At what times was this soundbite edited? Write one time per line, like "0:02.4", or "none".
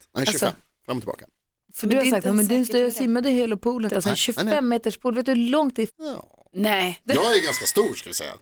0:03.9
0:05.9
0:07.0